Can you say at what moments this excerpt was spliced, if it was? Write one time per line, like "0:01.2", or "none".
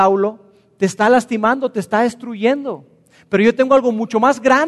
none